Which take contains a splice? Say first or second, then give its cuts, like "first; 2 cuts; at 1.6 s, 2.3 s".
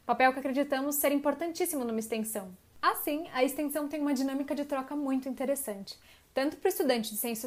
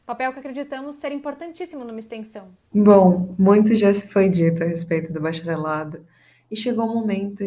second; 1 cut; at 2.7 s